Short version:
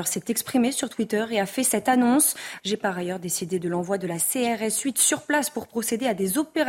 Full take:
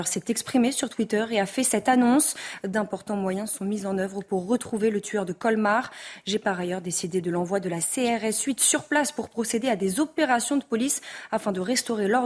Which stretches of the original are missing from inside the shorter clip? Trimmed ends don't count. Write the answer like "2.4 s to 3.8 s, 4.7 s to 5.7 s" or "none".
2.6 s to 6.2 s

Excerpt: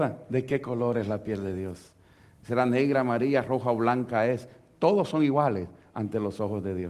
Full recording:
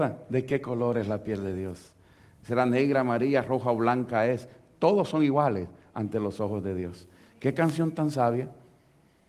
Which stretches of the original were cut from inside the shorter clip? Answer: none

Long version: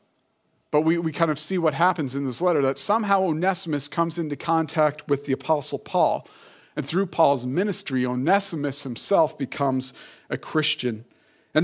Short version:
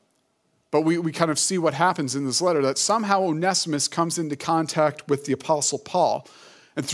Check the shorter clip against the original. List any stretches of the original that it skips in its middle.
none

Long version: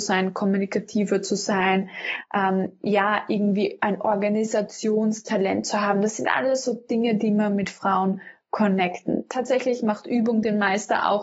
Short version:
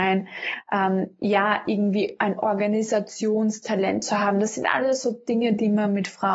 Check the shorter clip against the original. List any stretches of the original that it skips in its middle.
none

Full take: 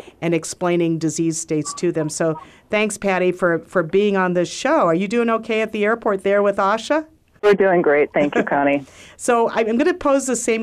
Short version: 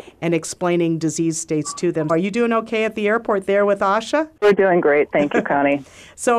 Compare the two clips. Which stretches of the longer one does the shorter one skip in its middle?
2.1 s to 4.9 s, 7.1 s to 7.4 s

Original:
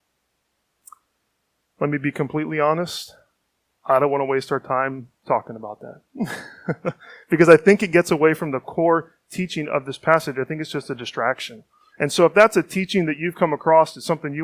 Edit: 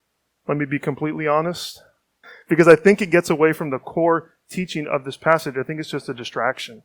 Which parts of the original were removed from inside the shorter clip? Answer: 3.6 s to 7.0 s

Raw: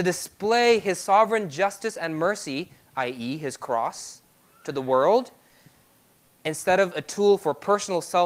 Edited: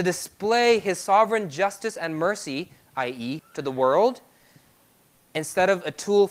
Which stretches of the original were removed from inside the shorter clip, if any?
3.4 s to 4.5 s

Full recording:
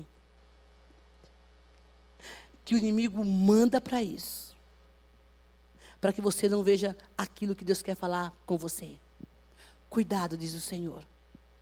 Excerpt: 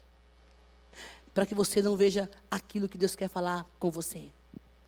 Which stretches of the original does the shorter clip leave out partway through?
2.6 s to 6.0 s

